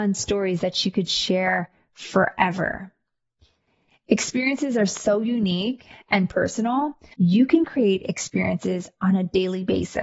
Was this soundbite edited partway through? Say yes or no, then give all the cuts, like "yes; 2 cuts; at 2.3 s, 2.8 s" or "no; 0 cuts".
yes; 2 cuts; at 3.9 s, 7.1 s